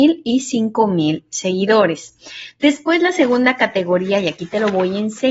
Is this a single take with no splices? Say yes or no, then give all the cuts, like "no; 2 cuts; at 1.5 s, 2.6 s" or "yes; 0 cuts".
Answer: yes; 0 cuts